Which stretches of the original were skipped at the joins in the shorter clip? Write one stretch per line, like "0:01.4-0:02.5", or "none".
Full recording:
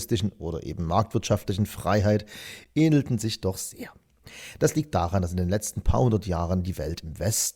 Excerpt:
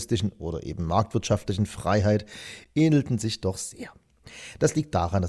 none